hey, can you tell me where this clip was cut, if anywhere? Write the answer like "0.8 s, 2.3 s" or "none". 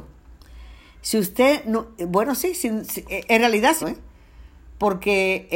3.8 s